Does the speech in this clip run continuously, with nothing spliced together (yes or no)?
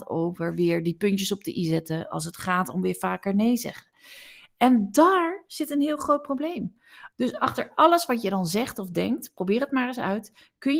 no